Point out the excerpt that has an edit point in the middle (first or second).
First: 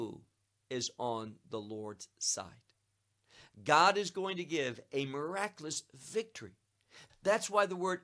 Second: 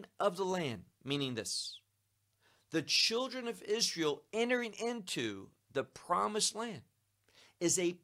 first